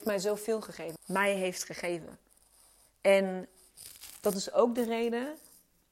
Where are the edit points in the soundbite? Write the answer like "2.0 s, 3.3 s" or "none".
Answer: 1.0 s